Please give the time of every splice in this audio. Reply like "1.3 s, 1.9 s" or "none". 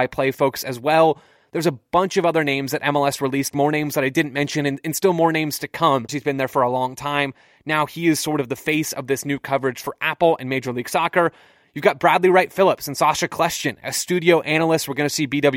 6.1 s